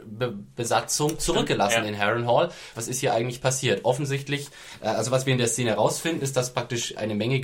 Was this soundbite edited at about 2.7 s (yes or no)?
yes